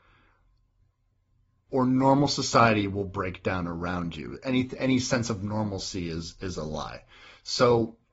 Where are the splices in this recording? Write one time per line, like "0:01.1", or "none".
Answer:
none